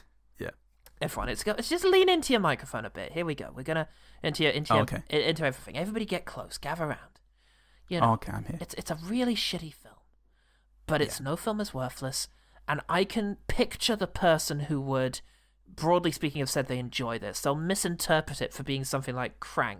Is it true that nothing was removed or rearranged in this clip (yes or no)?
no